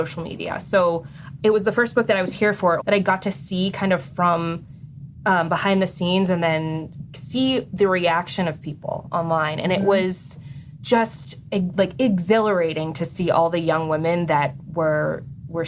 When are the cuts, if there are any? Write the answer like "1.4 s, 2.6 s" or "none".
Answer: 2.8 s